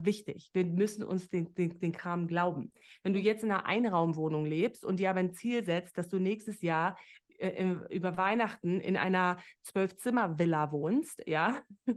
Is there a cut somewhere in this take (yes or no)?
no